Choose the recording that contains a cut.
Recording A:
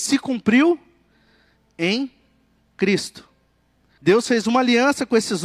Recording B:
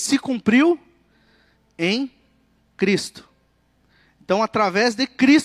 A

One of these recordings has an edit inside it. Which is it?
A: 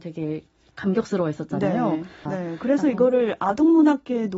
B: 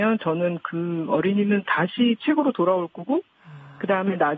A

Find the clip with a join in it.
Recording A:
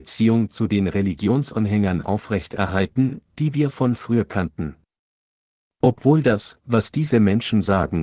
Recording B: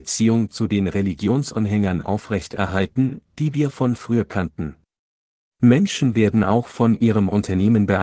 B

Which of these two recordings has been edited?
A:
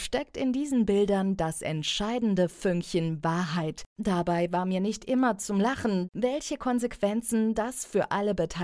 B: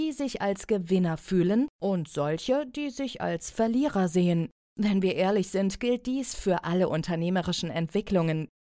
A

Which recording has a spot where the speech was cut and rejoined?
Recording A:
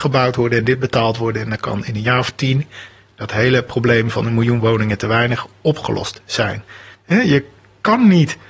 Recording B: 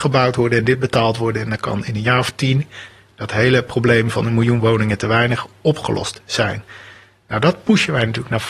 A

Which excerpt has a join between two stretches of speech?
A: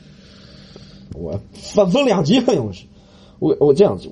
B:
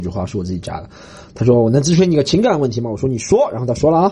A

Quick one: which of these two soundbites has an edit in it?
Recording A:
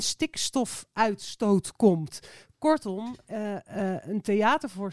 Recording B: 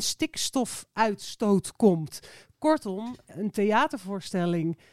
B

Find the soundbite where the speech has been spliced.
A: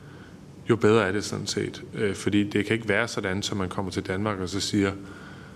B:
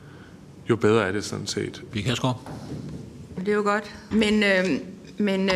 B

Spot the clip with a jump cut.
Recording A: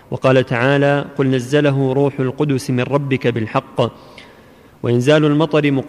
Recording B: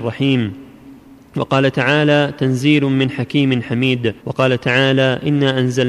B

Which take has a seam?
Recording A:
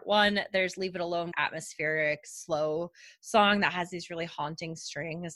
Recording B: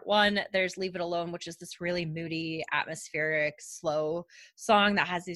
A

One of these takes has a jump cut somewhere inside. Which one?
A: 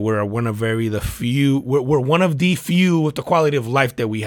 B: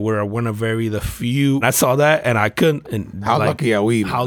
B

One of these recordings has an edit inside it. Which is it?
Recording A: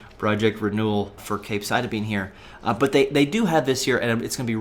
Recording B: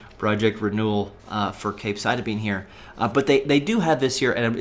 A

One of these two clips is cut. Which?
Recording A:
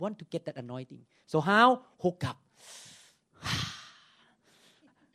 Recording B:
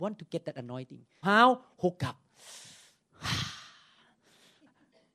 B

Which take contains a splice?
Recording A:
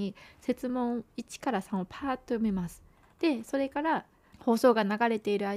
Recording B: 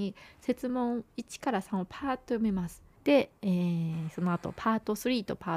B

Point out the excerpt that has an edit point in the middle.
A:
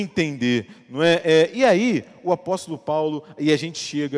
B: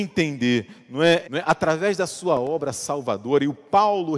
B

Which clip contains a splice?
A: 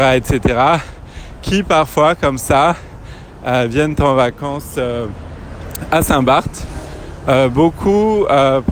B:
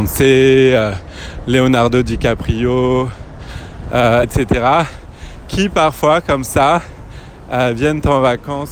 B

